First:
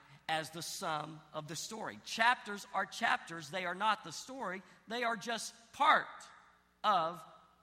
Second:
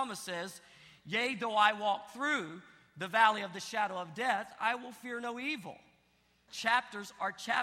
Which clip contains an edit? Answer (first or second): second